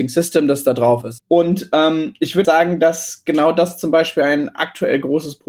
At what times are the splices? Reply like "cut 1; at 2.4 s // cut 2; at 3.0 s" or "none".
cut 1; at 1.2 s // cut 2; at 2.4 s